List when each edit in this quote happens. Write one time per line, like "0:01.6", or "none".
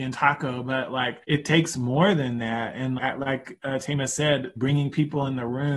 0:01.2
0:03.0
0:04.6